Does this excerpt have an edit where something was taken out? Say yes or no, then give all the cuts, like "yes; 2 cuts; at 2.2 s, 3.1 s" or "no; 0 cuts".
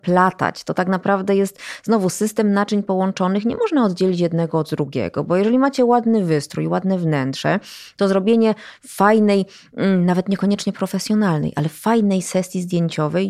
no; 0 cuts